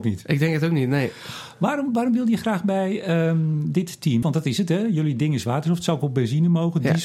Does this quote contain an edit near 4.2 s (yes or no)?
yes